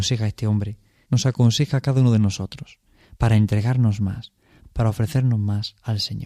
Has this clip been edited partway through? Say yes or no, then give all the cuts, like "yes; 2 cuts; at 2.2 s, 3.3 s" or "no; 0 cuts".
yes; 2 cuts; at 1.0 s, 4.6 s